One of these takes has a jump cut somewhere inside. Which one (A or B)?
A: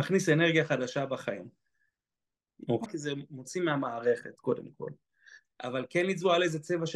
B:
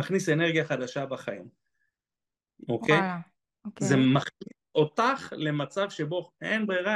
A